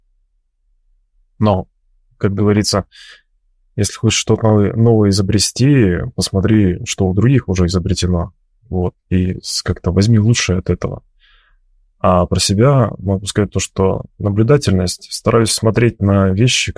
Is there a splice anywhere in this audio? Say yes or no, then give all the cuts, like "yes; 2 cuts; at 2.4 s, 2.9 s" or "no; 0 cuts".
no; 0 cuts